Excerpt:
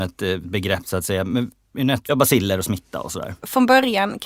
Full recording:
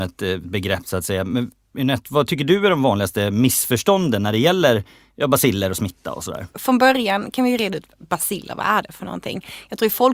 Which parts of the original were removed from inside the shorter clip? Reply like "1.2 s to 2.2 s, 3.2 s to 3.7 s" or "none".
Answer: 2.1 s to 5.2 s

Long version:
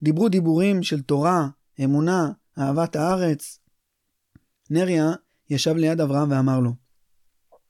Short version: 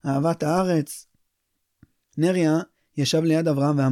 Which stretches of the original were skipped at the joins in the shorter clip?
none

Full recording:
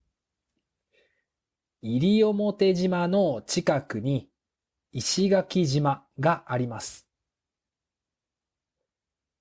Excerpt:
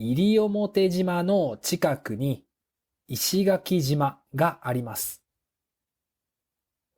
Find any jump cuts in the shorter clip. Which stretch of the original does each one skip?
none

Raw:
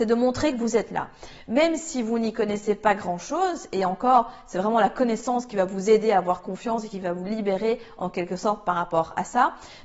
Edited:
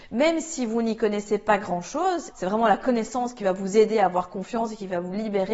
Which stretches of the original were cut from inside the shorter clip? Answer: 3.7 s to 4.4 s

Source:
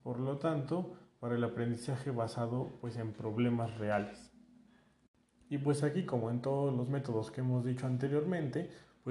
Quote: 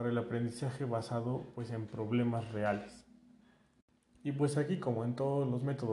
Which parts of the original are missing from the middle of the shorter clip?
none

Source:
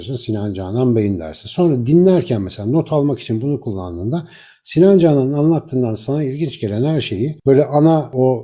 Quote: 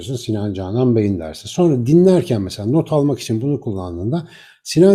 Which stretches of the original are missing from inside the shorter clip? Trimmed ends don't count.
none

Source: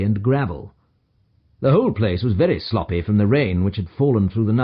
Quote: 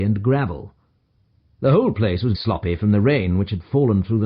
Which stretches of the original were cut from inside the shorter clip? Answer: 2.3 s to 2.6 s

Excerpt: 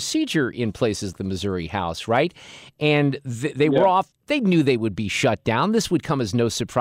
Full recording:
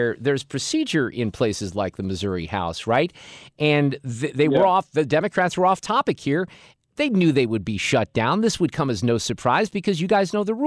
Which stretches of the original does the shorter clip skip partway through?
1.7 s to 1.9 s, 4.9 s to 6.8 s

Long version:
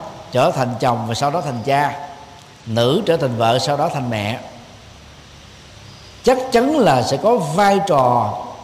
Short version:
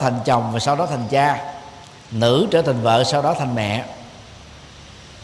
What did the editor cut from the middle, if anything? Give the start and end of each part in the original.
none

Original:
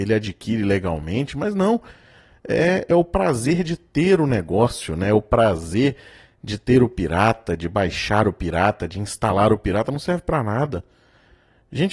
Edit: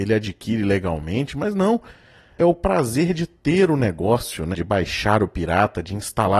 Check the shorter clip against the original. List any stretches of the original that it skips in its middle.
2.4 s to 2.9 s, 5.0 s to 7.6 s

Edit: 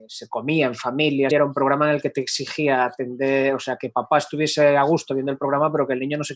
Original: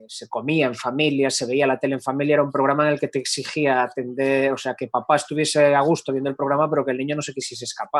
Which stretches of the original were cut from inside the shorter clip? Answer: 1.3 s to 2.3 s

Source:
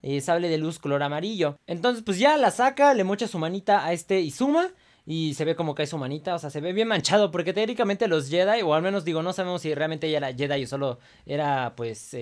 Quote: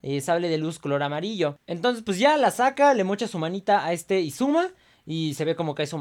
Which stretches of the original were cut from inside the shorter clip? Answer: none

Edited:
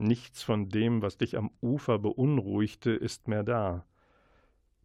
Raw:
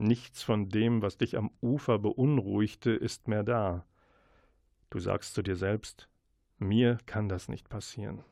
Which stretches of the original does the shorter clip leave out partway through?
none

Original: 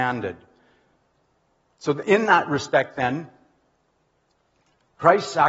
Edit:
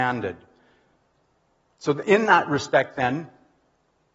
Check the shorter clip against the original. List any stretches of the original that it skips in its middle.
none

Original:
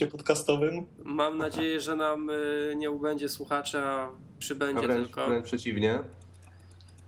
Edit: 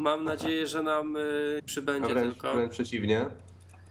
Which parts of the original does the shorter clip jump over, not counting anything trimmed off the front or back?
2.7 s to 4.3 s

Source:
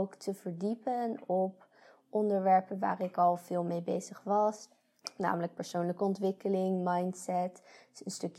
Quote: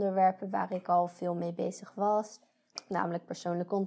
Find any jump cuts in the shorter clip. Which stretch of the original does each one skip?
none

